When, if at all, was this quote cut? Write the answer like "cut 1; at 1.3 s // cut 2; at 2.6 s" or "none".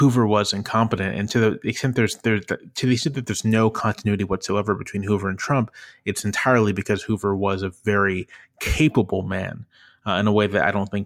none